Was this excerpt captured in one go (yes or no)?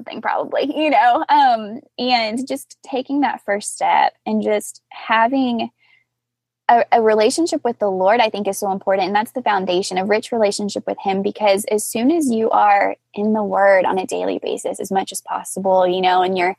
yes